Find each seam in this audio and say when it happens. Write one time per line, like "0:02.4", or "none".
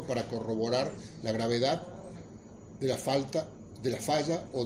none